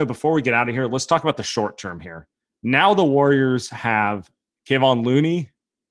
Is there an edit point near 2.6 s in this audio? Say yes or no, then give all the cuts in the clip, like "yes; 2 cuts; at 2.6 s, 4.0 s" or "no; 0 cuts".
no; 0 cuts